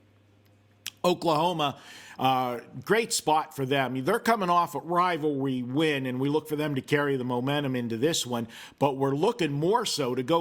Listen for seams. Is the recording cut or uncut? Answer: uncut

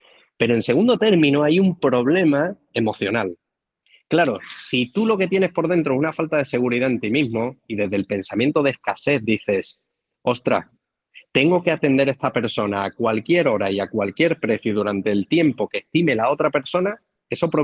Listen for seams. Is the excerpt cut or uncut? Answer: uncut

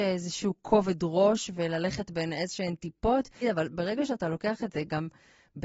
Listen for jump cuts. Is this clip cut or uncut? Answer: cut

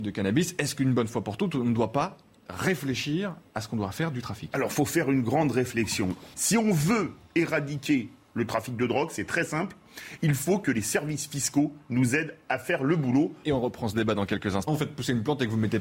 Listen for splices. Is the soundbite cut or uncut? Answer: cut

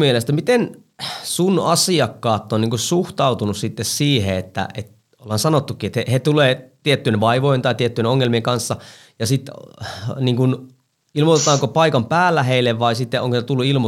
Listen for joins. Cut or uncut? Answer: uncut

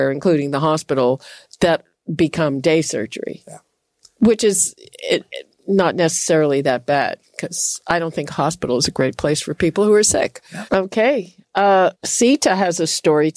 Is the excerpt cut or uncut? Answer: cut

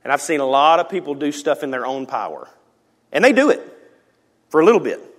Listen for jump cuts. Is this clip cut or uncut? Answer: uncut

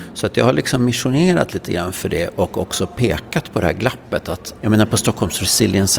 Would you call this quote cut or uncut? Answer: cut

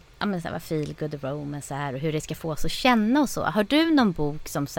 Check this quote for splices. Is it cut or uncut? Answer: uncut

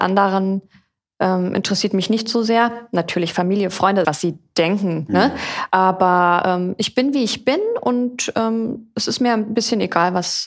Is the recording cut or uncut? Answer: cut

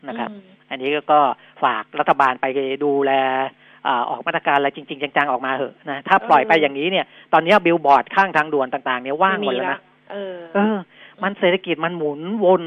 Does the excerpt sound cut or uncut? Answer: uncut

